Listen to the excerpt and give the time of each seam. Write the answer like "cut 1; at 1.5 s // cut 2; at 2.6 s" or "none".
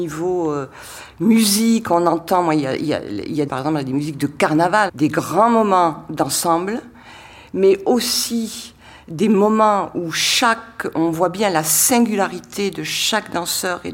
cut 1; at 3.5 s // cut 2; at 4.9 s